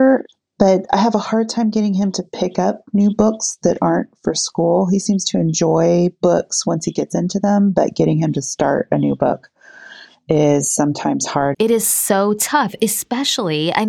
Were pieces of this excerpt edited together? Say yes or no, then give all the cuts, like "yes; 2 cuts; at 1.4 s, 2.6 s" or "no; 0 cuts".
yes; 1 cut; at 11.5 s